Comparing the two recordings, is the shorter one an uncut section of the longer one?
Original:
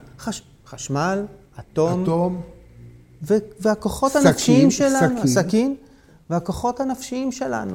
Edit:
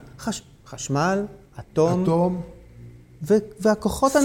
yes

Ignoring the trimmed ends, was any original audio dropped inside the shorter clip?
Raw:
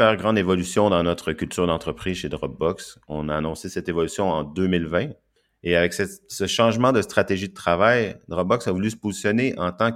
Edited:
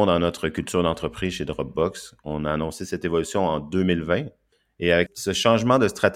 yes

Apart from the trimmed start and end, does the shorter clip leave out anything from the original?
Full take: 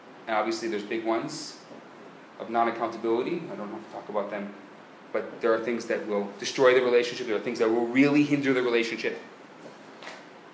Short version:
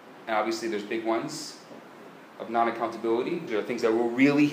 yes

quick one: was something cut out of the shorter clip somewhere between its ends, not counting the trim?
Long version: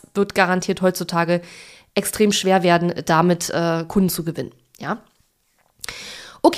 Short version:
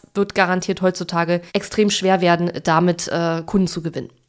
yes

